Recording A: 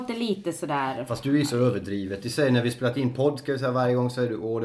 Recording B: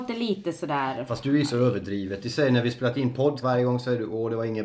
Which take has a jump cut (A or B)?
B